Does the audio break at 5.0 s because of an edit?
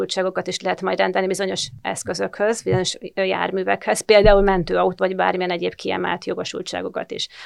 yes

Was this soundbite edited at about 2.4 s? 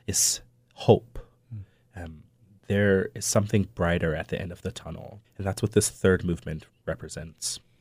no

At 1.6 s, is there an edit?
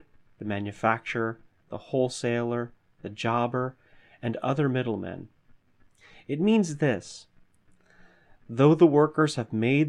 yes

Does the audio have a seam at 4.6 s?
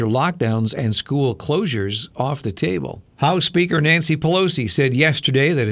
no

